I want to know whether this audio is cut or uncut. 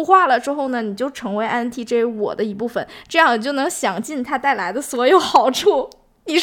uncut